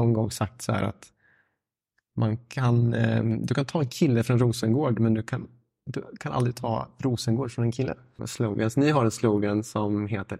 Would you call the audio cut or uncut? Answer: cut